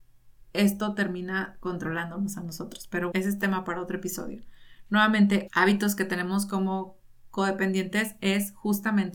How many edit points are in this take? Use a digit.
2